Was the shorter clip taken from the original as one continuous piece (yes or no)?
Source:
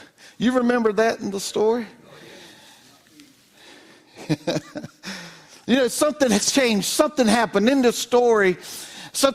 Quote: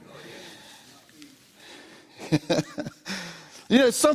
yes